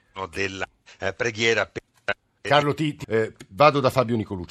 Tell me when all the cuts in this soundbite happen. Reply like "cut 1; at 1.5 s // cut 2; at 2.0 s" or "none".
cut 1; at 3.0 s